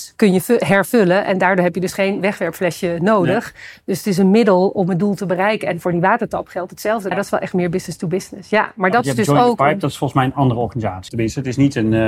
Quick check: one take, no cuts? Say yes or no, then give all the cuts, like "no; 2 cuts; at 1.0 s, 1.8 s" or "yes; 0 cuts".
no; 2 cuts; at 7.1 s, 11.1 s